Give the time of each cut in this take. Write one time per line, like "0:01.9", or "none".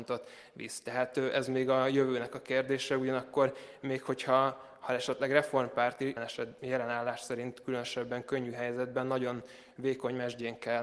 0:06.2